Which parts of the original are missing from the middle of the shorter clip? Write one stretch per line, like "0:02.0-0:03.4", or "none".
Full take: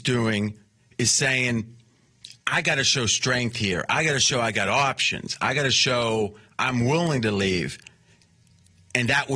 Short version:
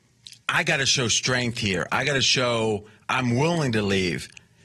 0:03.9-0:05.4